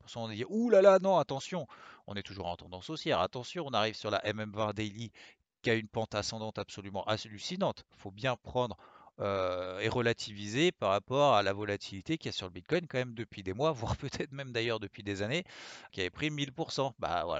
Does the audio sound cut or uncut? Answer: cut